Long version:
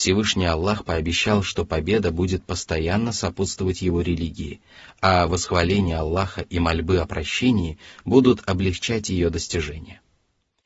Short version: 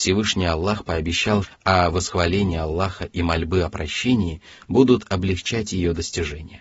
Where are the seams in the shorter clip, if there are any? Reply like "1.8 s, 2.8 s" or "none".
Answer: 1.4 s